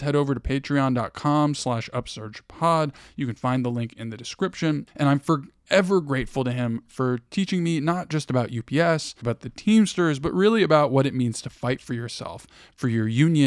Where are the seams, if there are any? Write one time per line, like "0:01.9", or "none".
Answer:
0:04.9
0:09.2